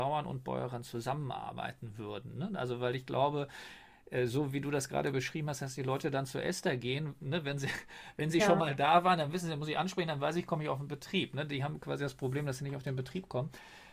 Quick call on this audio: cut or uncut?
uncut